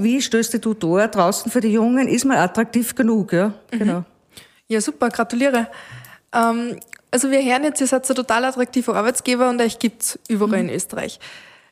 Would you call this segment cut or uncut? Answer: uncut